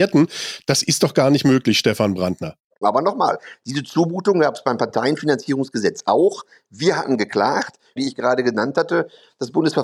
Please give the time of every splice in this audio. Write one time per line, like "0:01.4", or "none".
0:02.8
0:08.0